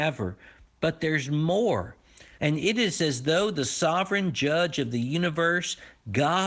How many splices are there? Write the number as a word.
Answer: one